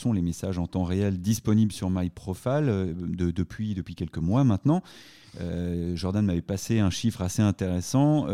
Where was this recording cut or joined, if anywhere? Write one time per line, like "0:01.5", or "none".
none